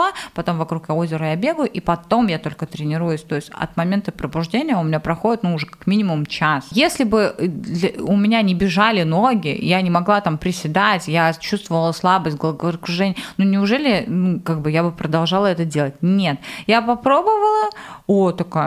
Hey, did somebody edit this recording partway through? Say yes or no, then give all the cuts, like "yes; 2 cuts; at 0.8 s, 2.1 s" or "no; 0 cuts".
no; 0 cuts